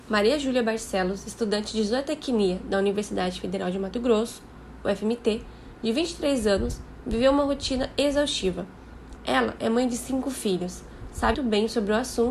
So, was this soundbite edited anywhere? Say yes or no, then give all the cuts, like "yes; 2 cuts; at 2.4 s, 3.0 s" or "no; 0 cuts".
yes; 2 cuts; at 9.2 s, 11.3 s